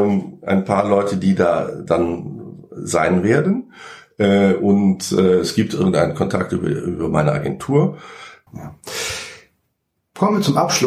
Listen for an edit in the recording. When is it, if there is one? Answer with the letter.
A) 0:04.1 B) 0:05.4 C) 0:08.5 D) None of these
C